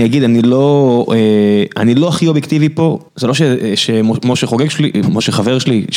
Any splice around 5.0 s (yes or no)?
yes